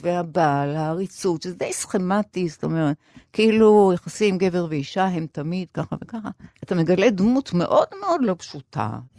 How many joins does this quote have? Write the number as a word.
zero